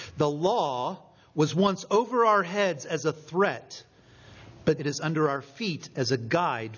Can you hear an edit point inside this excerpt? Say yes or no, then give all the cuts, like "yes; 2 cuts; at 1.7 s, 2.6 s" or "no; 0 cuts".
yes; 1 cut; at 4.8 s